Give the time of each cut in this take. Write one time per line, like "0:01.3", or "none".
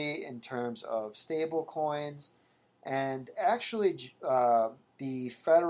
none